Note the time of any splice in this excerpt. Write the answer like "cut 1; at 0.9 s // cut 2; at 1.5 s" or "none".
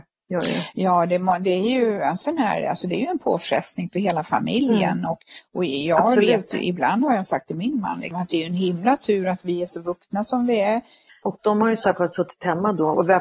cut 1; at 2.2 s // cut 2; at 11.1 s